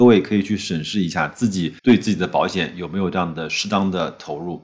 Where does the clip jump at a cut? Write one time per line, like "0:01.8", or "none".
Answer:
0:01.8

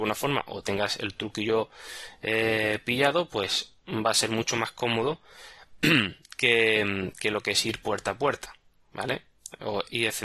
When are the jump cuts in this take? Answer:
none

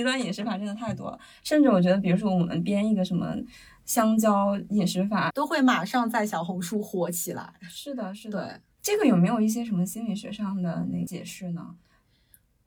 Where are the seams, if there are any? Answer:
0:05.3

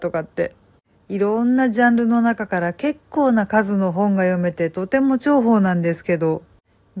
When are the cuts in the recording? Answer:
0:01.0

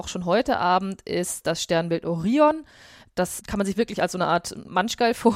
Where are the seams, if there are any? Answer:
none

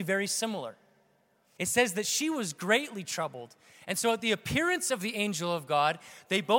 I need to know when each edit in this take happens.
0:01.6

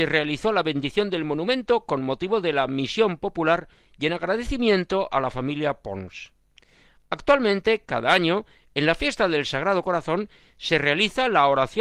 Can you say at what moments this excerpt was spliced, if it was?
none

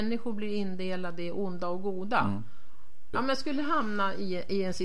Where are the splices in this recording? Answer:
0:03.1

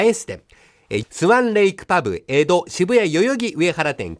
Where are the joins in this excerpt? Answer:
0:01.0

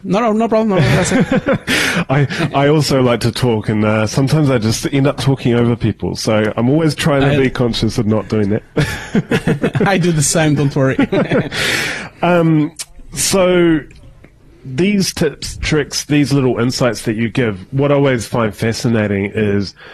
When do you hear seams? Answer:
none

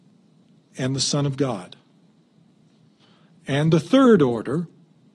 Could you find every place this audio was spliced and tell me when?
none

